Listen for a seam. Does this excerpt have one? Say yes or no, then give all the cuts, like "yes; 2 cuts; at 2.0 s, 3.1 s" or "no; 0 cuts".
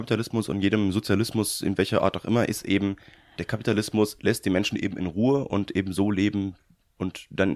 no; 0 cuts